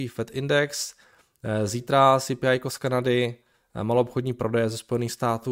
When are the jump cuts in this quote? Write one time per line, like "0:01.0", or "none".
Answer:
none